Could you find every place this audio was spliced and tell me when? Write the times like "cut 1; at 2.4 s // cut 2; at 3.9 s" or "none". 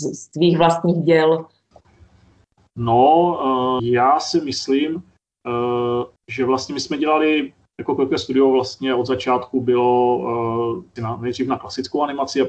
cut 1; at 3.8 s // cut 2; at 6.2 s // cut 3; at 11.0 s